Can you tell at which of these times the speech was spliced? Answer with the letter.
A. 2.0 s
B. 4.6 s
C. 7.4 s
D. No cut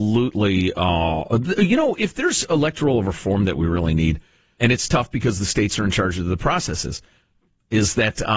B